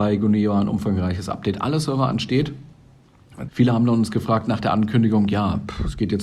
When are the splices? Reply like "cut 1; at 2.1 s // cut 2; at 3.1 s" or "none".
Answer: cut 1; at 3.5 s